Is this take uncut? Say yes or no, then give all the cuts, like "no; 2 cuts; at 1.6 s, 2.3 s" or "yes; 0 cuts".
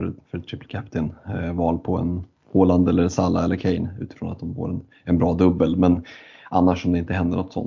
yes; 0 cuts